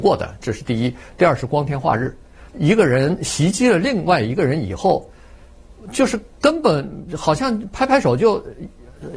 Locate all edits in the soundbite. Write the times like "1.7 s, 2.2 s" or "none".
2.5 s